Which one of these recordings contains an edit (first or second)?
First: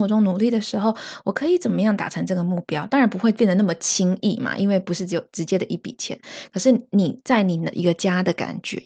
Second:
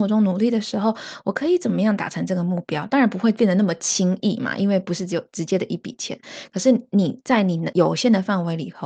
first